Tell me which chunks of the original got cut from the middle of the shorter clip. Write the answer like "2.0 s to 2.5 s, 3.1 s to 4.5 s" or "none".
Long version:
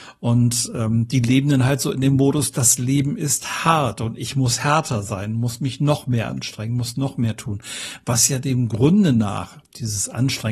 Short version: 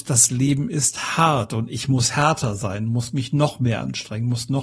none